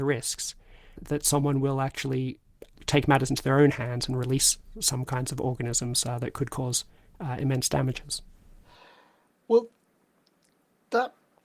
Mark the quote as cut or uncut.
uncut